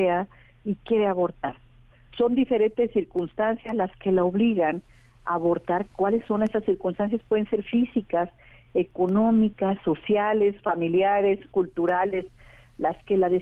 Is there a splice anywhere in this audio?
no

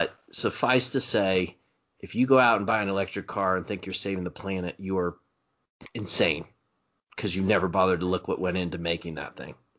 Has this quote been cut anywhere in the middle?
no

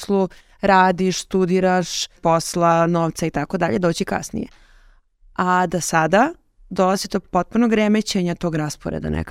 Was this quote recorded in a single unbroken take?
no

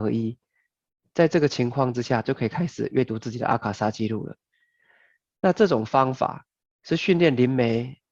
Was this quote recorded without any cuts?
yes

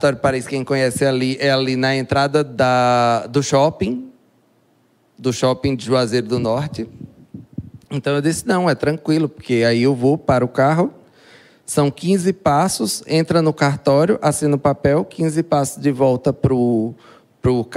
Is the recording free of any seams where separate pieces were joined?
yes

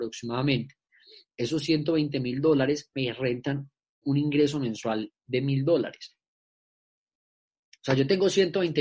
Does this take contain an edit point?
no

